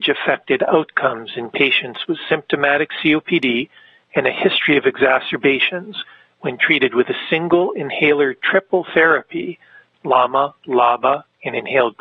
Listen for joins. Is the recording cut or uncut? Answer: uncut